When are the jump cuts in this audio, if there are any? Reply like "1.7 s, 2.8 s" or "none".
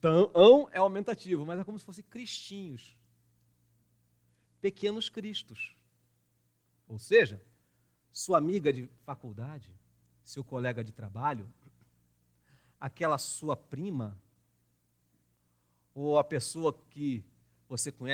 none

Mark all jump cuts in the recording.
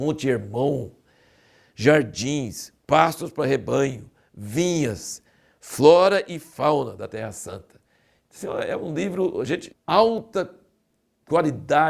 9.7 s

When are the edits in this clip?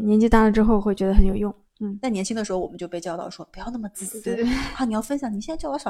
4.4 s

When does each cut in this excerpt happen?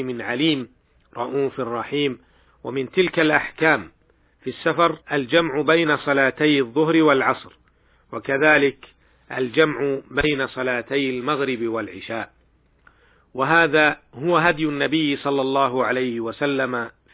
2.5 s, 5.0 s

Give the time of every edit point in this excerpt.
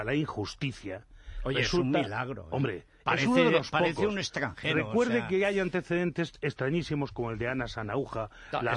none

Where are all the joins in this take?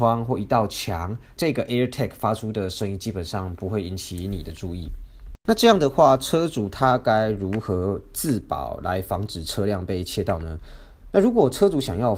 none

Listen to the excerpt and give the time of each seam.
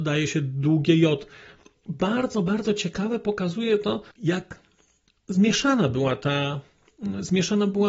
4.1 s

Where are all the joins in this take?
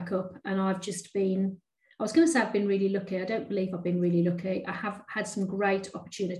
none

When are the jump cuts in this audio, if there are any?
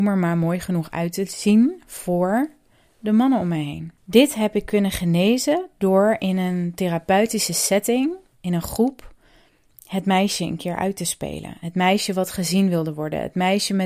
4.0 s

